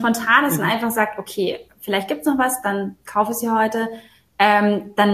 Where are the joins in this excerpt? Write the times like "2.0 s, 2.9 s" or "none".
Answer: none